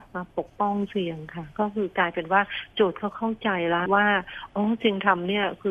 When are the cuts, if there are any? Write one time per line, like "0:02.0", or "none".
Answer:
0:03.9